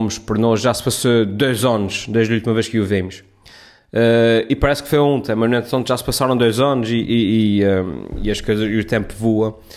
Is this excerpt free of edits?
yes; 0 cuts

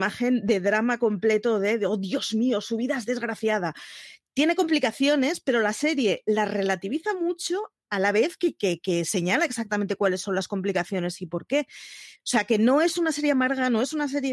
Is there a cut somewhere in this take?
no; 0 cuts

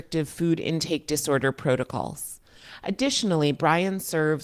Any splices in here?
no; 0 cuts

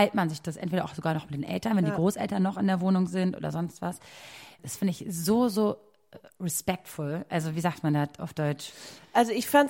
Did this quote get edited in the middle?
no; 0 cuts

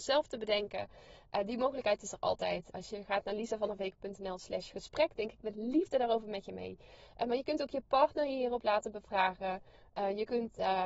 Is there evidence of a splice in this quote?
no; 0 cuts

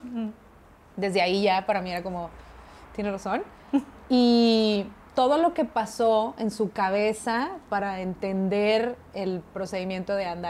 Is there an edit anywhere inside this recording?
no; 0 cuts

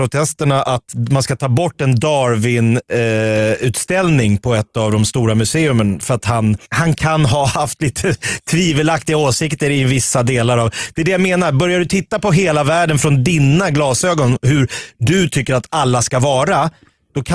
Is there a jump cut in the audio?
yes; 1 cut; at 6.6 s

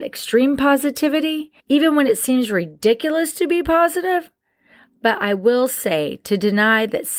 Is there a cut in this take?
yes; 1 cut; at 1.6 s

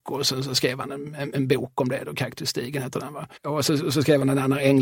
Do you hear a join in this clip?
yes; 1 cut; at 3.4 s

